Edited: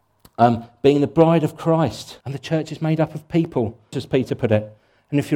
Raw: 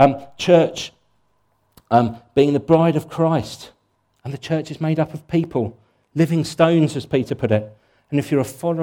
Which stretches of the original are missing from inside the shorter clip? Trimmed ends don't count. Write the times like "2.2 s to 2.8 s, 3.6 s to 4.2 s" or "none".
3.7 s to 4.2 s, 5.9 s to 6.9 s